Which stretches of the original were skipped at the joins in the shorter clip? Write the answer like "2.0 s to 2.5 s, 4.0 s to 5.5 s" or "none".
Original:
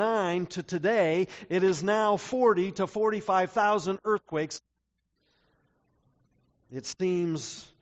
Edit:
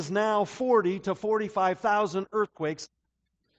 none